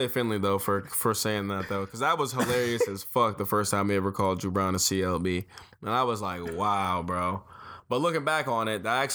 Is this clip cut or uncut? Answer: uncut